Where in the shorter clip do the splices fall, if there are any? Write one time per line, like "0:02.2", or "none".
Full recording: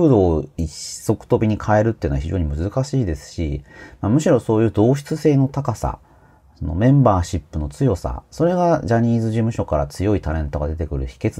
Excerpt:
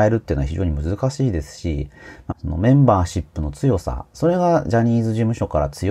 0:02.3